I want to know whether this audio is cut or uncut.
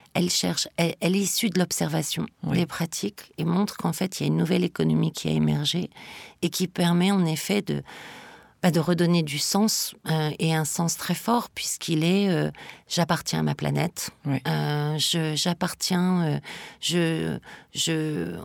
uncut